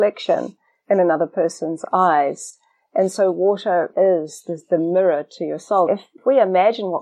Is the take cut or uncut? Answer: cut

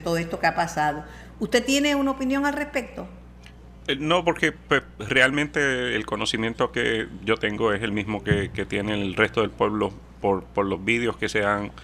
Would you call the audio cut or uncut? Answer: uncut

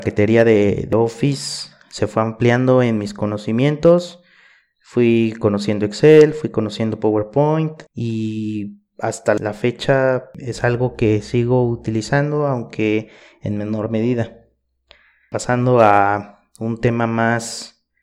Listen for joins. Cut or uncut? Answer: cut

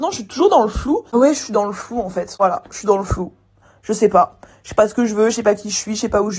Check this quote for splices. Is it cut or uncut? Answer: cut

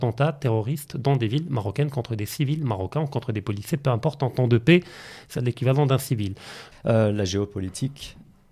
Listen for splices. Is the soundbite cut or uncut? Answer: cut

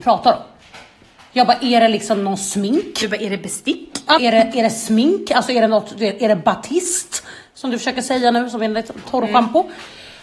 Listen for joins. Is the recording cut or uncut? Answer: cut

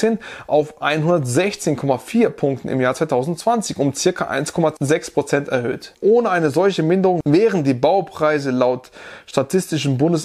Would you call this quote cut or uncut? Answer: cut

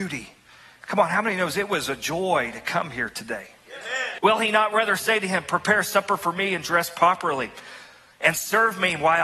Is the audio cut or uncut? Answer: cut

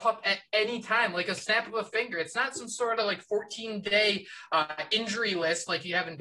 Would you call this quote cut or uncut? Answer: uncut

